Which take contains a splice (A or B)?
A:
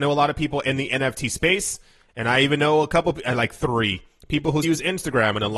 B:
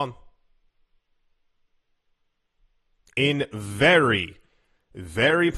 A